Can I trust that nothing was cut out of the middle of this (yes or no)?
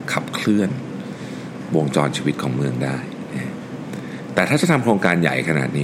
yes